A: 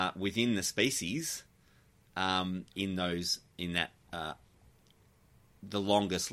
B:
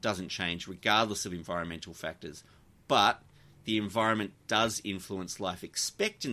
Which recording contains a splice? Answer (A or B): A